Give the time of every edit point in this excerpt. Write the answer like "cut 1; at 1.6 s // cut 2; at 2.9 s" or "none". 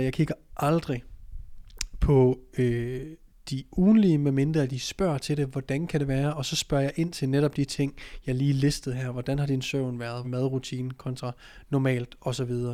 cut 1; at 10.2 s